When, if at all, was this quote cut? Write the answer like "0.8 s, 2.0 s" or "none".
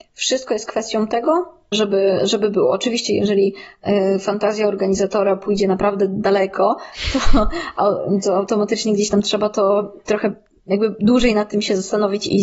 1.7 s